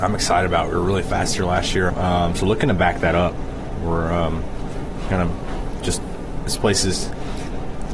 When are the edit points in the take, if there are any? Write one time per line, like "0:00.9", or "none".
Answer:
0:01.9